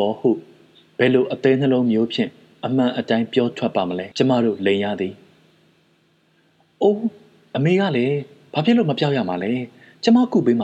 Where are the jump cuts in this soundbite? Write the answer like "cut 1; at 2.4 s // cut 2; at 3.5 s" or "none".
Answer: cut 1; at 4.1 s